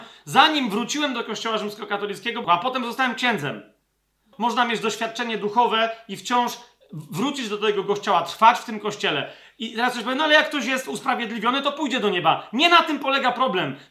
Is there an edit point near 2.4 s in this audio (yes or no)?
yes